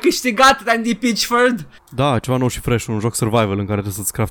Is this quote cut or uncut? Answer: cut